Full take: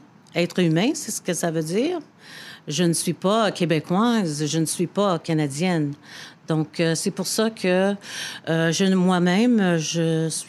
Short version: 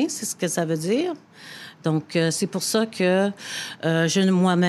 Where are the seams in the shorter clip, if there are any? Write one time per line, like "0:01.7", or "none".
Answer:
0:01.8